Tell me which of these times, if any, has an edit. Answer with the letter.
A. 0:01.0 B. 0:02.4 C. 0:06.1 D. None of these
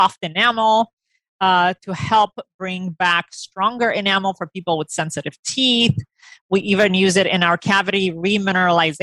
D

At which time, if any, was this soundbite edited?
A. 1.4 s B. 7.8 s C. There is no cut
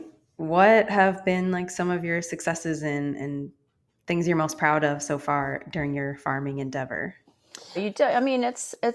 B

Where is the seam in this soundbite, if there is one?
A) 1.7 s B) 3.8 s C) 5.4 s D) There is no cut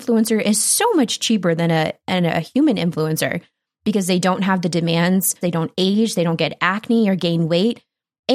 C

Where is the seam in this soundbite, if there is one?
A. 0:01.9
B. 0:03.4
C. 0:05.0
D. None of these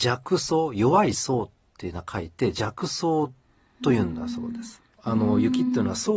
C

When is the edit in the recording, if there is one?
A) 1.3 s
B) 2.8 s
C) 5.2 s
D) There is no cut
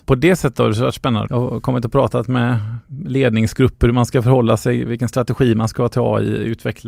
A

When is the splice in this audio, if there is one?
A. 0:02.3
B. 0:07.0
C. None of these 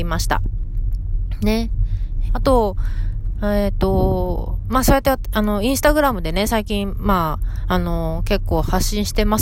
A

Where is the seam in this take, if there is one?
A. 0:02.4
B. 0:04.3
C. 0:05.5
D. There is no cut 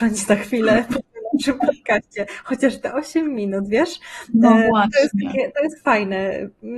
D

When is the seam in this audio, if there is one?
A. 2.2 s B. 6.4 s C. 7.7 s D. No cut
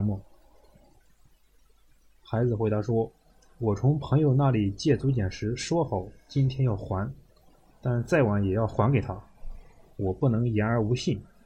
C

